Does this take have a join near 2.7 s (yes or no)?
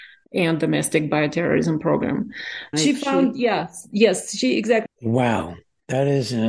yes